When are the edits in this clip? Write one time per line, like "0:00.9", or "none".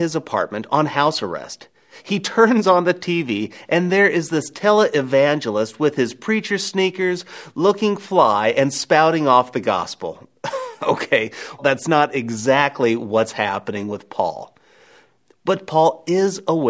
0:11.6